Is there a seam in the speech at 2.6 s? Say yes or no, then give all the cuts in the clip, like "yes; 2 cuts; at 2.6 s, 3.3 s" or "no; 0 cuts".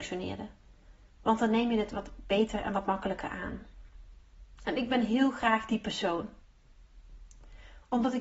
no; 2 cuts; at 1.1 s, 4.5 s